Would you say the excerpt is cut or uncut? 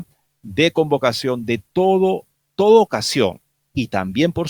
uncut